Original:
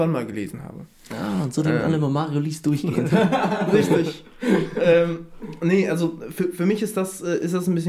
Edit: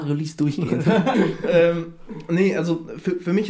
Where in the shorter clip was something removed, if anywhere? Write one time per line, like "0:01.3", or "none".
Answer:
0:01.1